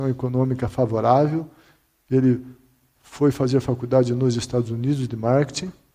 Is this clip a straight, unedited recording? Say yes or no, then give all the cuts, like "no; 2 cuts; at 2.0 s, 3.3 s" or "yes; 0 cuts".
yes; 0 cuts